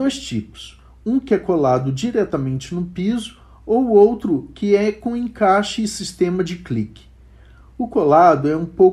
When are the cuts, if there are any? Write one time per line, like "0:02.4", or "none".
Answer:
none